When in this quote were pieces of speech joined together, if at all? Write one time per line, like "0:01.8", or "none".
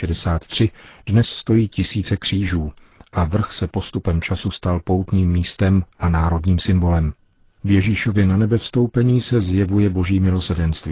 0:07.4